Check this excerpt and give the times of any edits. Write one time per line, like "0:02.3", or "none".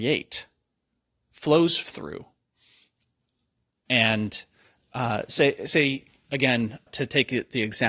0:03.9
0:06.9